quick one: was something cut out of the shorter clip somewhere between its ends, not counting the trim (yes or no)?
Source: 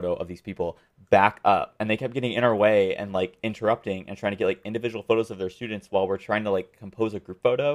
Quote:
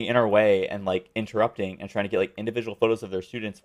no